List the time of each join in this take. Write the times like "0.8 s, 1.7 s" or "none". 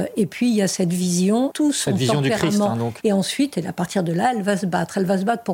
1.5 s, 3.0 s